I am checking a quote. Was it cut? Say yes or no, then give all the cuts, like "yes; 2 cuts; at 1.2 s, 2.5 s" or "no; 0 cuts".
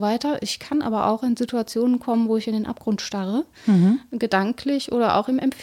no; 0 cuts